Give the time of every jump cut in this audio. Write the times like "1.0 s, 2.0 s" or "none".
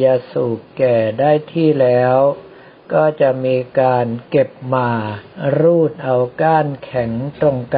none